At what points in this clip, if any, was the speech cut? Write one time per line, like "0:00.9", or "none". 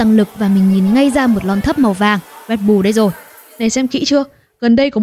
none

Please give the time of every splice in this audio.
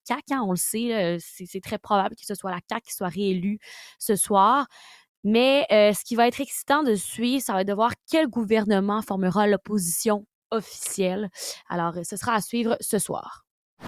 none

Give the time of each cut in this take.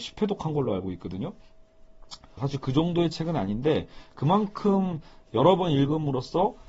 0:02.4

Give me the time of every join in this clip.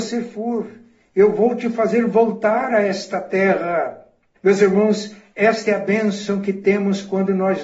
0:04.4

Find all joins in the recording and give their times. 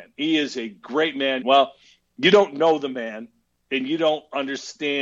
0:01.4

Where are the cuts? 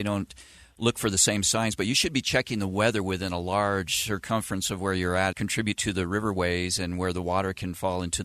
0:05.3

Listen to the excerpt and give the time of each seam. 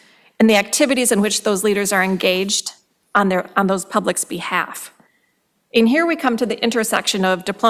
none

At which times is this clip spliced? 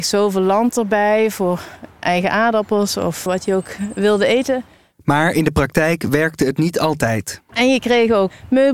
0:03.3

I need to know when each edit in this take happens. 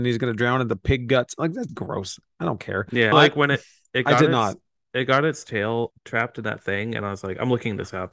0:01.7
0:03.1

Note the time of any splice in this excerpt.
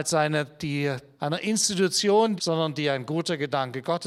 0:01.2
0:02.4

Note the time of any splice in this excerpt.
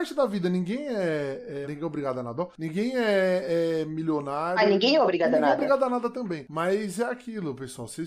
0:01.6

